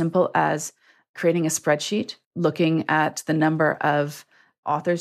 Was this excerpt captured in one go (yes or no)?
no